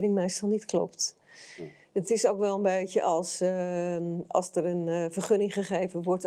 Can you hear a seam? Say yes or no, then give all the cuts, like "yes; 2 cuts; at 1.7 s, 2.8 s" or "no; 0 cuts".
yes; 1 cut; at 2.0 s